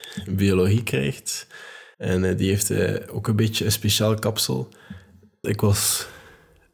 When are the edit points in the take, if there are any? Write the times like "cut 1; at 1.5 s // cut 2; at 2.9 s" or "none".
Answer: cut 1; at 1.9 s // cut 2; at 5.4 s